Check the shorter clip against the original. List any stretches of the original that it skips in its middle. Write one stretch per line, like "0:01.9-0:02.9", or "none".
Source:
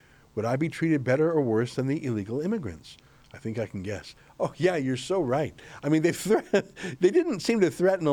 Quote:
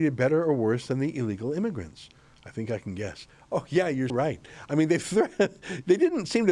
0:05.0-0:05.2